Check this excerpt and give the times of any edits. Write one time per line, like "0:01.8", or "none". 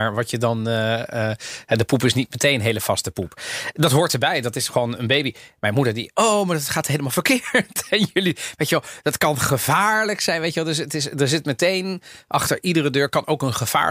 none